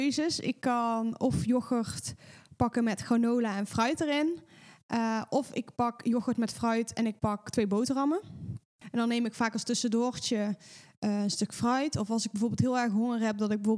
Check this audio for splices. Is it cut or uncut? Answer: cut